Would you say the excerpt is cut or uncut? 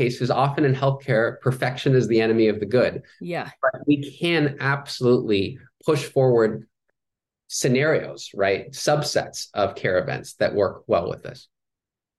uncut